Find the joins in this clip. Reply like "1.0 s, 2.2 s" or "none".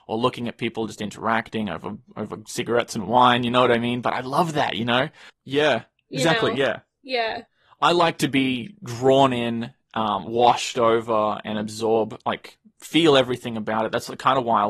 5.3 s